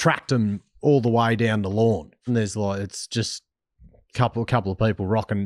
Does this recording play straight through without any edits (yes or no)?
no